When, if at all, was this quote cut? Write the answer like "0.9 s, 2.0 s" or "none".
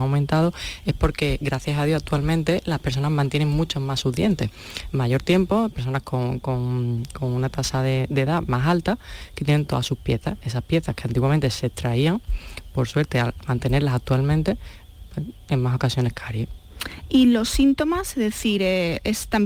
10.4 s, 15.5 s